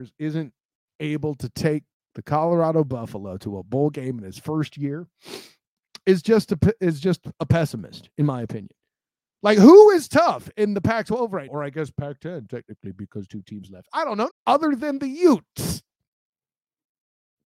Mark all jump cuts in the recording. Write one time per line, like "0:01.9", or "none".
0:11.5
0:14.3